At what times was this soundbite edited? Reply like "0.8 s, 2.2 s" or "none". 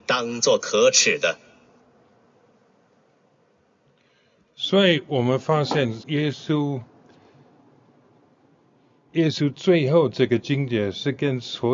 6.0 s